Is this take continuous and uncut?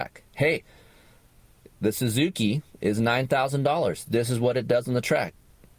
yes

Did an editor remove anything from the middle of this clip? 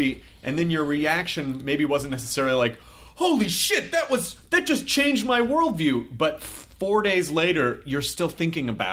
no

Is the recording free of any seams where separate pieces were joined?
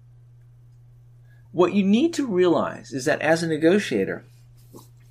no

